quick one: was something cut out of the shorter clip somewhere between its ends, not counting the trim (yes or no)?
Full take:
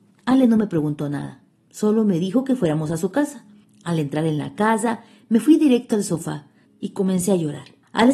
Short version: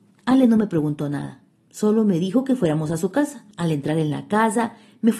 yes